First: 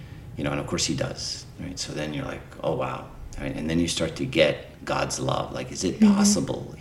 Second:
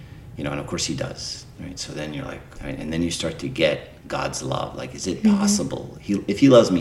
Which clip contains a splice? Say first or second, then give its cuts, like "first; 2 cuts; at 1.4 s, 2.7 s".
second; 1 cut; at 2.6 s